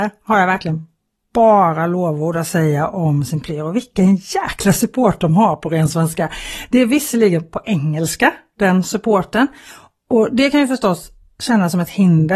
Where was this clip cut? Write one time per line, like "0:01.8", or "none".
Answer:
none

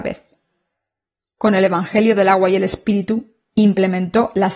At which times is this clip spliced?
none

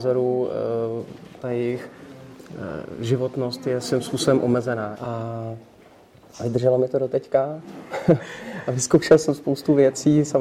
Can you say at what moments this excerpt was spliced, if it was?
0:01.4
0:04.9

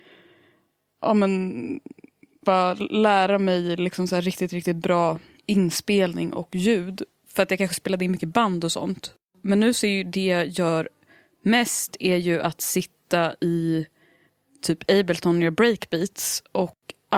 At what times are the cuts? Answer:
none

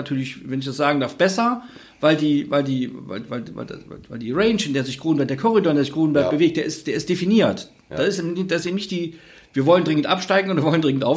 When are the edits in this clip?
none

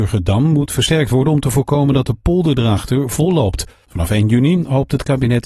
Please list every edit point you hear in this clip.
0:03.8

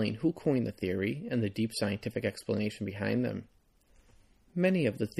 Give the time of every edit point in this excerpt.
none

